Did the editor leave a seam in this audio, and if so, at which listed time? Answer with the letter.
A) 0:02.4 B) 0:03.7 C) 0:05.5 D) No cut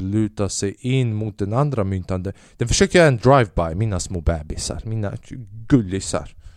B